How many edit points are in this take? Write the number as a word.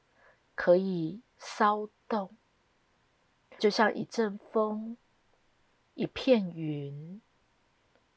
one